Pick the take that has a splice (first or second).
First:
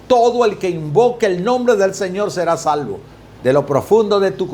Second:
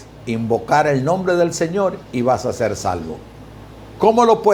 first